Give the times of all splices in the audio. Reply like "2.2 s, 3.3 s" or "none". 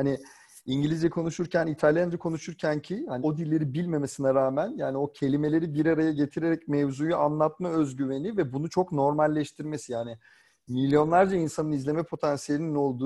3.2 s